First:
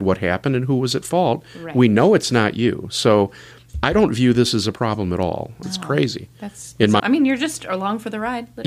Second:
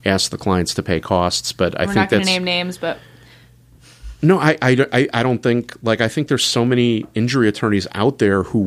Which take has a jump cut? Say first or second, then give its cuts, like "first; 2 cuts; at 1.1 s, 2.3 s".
first; 2 cuts; at 5.6 s, 7.0 s